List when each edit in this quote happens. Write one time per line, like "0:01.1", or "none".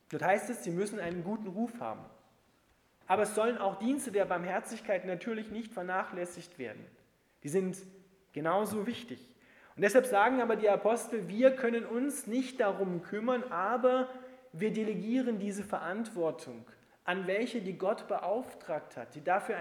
0:03.0

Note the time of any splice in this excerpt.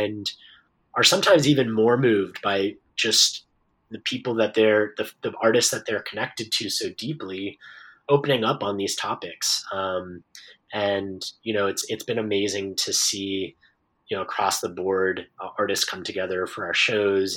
none

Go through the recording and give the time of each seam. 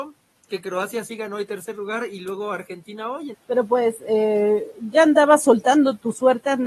0:03.3

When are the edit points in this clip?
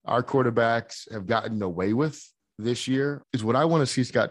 0:03.2

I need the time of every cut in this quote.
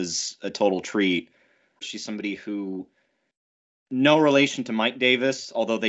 0:01.8

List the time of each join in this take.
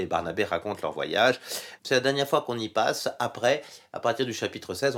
0:01.8

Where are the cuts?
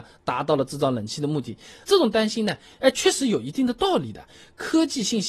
0:01.8

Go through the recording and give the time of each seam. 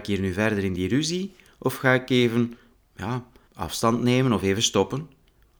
0:03.5

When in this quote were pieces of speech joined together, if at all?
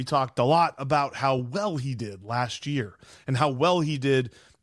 none

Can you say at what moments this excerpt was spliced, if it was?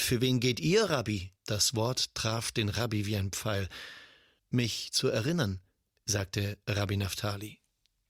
0:01.4
0:04.4

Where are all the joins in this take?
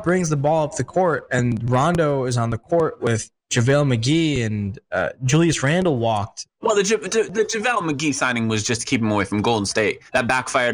0:03.4

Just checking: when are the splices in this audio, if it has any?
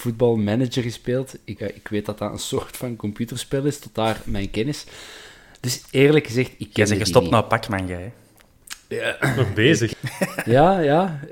0:01.6
0:09.9

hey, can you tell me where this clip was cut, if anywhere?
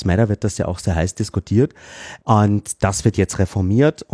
0:02.2

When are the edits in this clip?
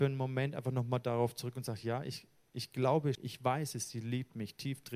0:03.1

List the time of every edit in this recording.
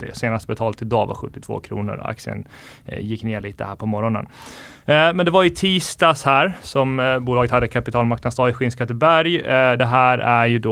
none

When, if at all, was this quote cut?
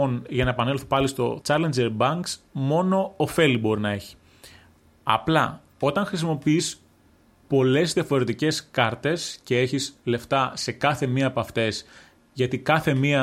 0:01.4

